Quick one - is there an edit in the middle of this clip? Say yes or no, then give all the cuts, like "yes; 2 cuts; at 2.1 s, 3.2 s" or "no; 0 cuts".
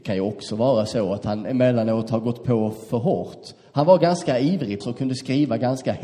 yes; 1 cut; at 4.8 s